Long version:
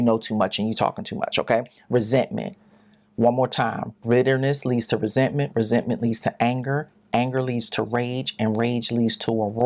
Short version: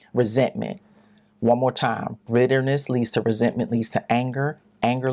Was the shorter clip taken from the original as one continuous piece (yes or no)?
no